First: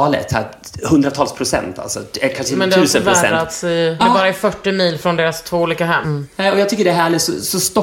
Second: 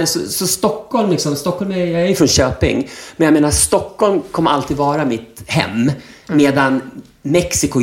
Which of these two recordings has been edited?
first; 2 cuts; at 4.0 s, 6.0 s

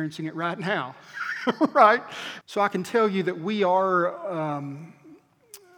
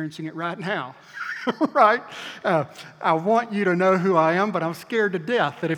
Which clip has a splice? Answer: first; 1 cut; at 2.4 s

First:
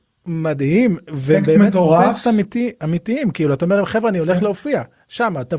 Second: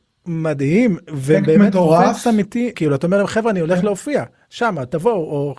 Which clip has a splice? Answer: second; 1 cut; at 2.7 s

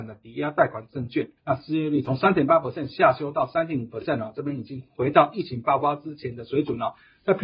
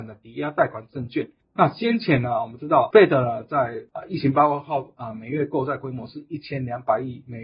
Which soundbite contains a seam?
first; 1 cut; at 1.4 s

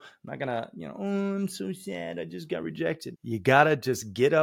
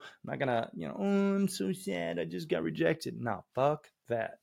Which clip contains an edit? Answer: first; 1 cut; at 3.1 s

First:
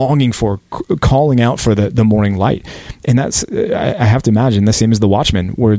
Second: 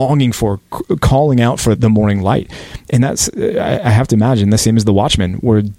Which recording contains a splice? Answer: second; 1 cut; at 1.8 s

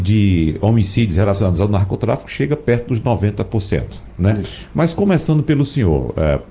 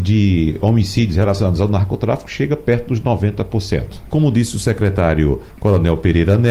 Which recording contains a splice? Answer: second; 1 cut; at 4.1 s

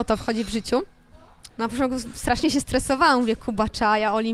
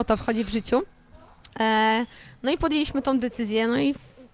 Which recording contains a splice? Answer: first; 1 cut; at 1.5 s

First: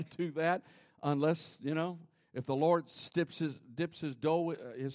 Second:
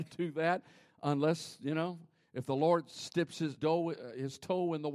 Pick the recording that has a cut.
second; 1 cut; at 3.6 s

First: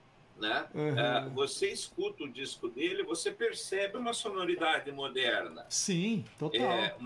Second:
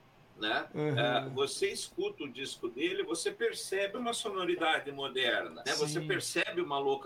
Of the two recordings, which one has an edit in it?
second; 1 cut; at 5.7 s

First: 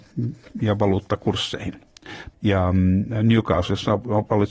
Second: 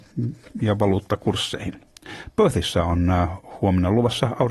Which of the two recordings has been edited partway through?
first; 1 cut; at 2.3 s

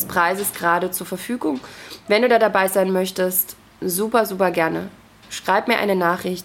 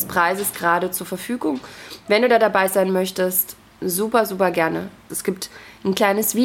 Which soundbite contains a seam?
second; 1 cut; at 5.1 s

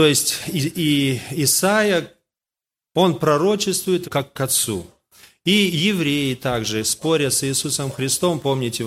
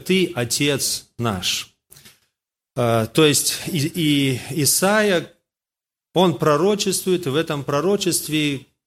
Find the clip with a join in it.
first; 1 cut; at 4.0 s

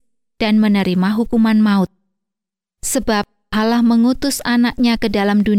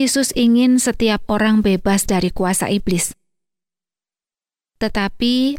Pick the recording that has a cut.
first; 1 cut; at 2.8 s

